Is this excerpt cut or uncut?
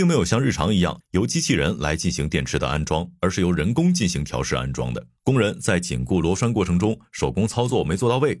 cut